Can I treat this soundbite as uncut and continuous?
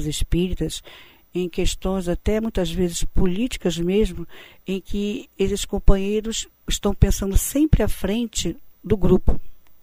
no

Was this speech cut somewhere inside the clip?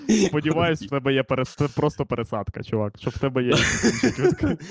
no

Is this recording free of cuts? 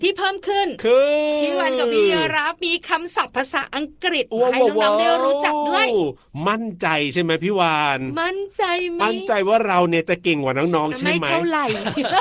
no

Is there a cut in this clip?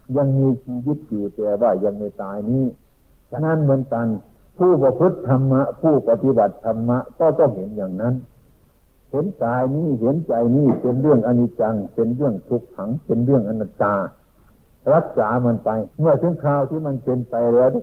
yes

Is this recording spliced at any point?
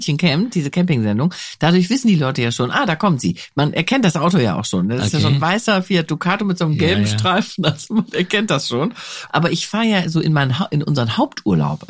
yes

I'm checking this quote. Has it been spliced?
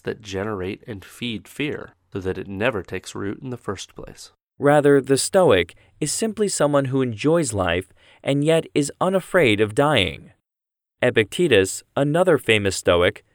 yes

